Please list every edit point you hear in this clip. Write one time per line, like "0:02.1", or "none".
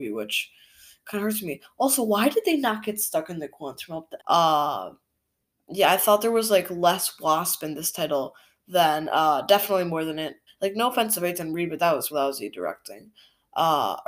0:04.2
0:10.5
0:12.1